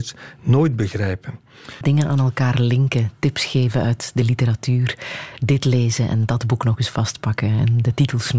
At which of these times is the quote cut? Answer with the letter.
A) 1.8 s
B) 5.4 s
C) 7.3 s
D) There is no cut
A